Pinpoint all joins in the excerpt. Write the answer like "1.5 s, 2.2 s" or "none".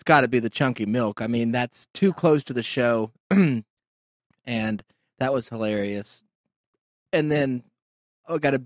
none

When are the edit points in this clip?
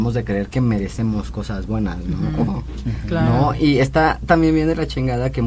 2.5 s

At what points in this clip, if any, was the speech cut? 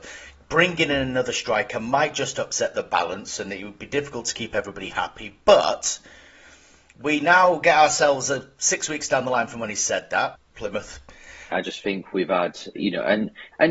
10.3 s, 11.5 s, 12.8 s

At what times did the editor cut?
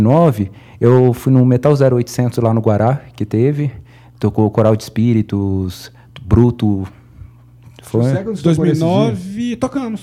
none

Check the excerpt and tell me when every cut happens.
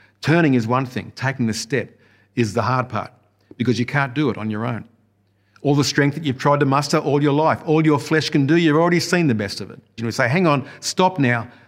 10.0 s

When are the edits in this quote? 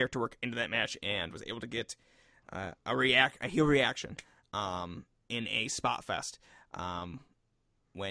none

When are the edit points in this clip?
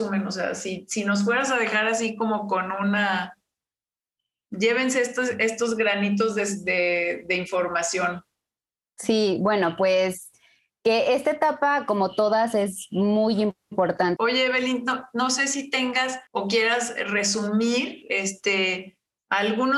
14.2 s, 16.3 s

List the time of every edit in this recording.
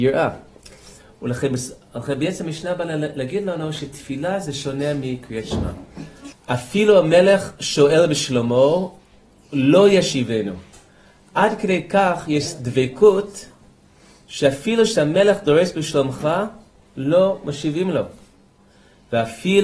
6.3 s

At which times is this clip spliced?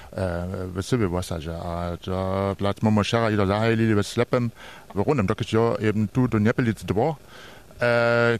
4.9 s, 6.3 s

